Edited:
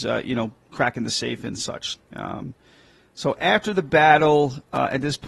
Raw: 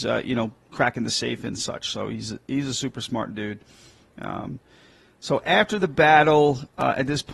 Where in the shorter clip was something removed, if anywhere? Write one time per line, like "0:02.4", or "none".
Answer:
0:01.9